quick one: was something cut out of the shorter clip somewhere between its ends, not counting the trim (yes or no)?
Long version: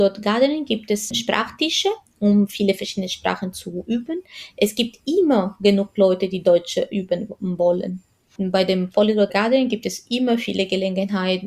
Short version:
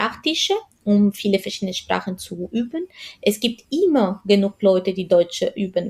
no